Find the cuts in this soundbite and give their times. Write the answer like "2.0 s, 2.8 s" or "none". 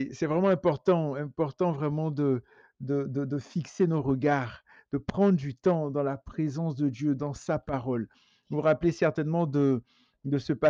none